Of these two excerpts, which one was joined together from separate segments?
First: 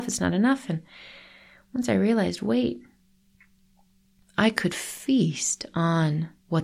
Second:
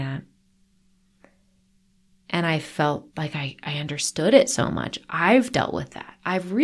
second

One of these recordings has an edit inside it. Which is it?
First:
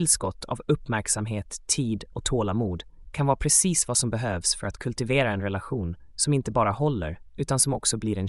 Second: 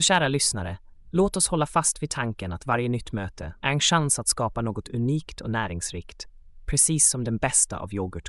second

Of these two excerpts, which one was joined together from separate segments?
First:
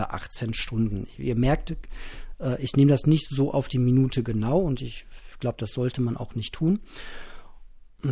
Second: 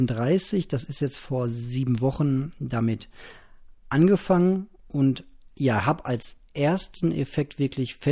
second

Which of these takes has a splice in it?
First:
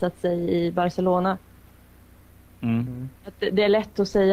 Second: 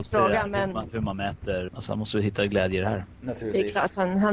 second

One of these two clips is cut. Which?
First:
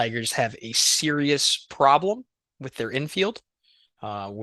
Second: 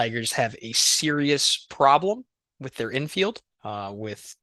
second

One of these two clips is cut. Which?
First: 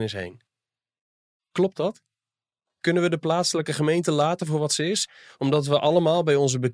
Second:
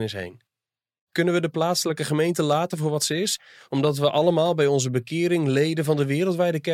second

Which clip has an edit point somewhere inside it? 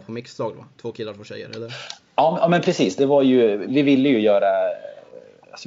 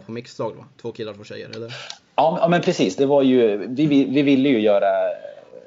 first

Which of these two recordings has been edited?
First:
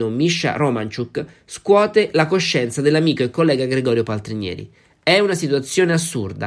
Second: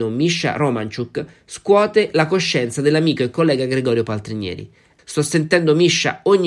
second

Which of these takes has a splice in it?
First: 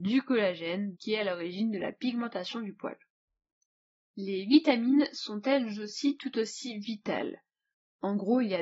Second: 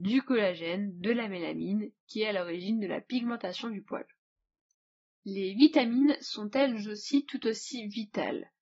first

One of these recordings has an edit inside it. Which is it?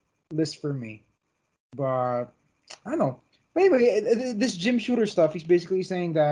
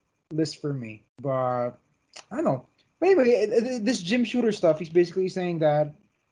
second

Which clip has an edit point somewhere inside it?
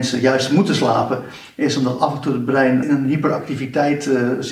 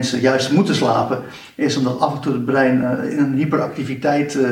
first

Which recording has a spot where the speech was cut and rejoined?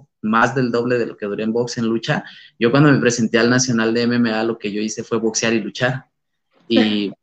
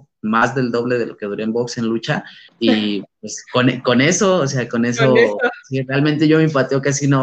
second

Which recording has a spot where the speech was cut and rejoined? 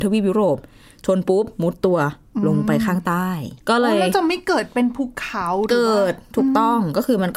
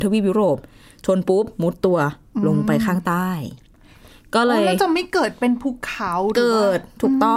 first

